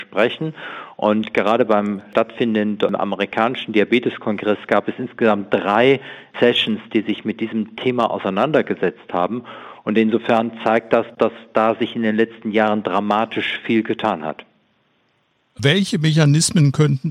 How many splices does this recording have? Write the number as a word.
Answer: zero